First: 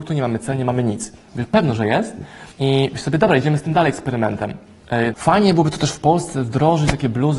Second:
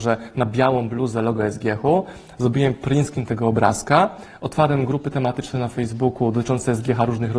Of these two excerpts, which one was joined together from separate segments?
first; 3 cuts; at 1.3 s, 2.5 s, 5.1 s

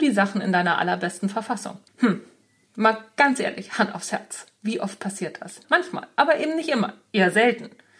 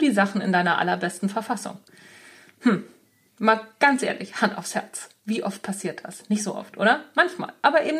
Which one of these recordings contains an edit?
first; 2 cuts; at 1.9 s, 5.6 s

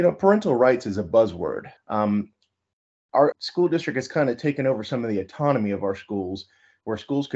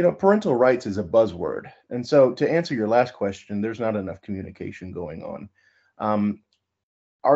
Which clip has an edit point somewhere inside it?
first; 2 cuts; at 1.8 s, 3.3 s

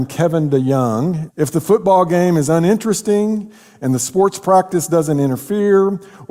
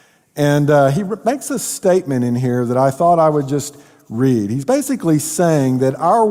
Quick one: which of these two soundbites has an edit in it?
first; 1 cut; at 1.3 s

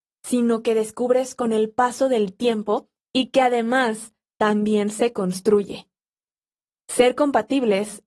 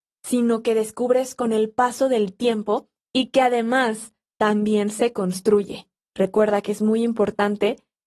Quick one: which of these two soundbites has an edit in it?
second; 1 cut; at 6.1 s

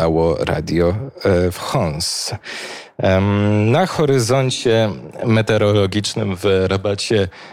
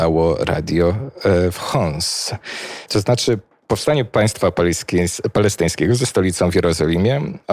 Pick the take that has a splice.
second; 1 cut; at 2.9 s

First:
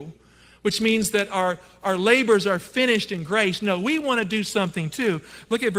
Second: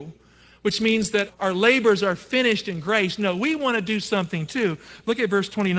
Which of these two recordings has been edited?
second; 1 cut; at 1.3 s

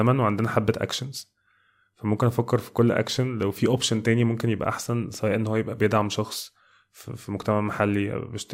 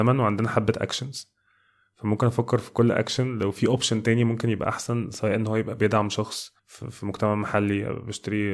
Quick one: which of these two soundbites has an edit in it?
second; 1 cut; at 6.6 s

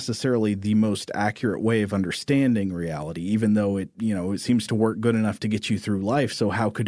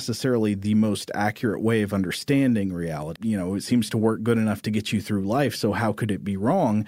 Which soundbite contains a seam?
second; 1 cut; at 3.2 s

